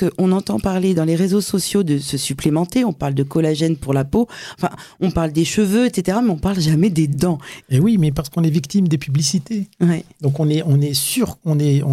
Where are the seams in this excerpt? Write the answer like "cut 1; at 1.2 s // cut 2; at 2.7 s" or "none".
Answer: cut 1; at 7.6 s